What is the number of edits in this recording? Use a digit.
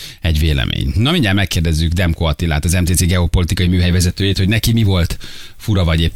0